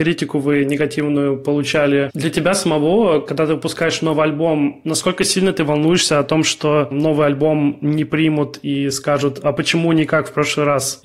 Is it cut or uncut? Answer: uncut